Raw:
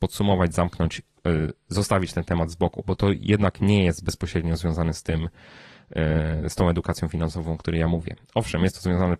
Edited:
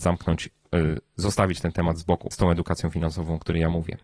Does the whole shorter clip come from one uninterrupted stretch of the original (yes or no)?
no